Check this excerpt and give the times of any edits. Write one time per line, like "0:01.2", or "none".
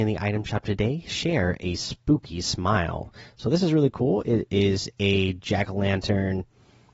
none